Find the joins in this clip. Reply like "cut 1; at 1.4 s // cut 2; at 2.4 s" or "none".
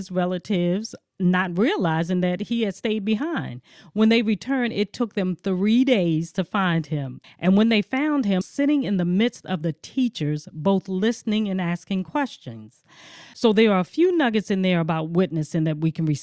cut 1; at 7.2 s // cut 2; at 8.4 s